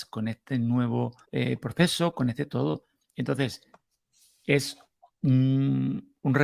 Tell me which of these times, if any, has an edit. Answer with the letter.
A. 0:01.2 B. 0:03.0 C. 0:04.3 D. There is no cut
A